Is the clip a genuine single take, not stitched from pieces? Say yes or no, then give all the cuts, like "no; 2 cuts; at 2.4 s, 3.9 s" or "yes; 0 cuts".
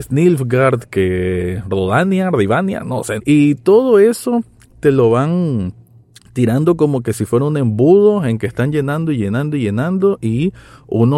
no; 1 cut; at 3.2 s